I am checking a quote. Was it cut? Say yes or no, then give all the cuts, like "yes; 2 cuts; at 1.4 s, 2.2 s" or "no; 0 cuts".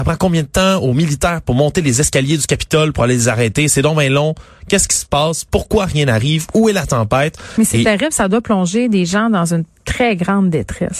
no; 0 cuts